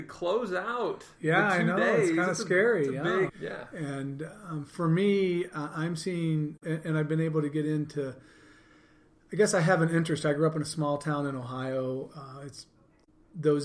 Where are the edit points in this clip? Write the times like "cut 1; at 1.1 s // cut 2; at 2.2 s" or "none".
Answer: cut 1; at 3.3 s